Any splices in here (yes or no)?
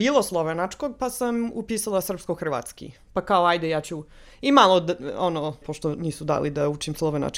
yes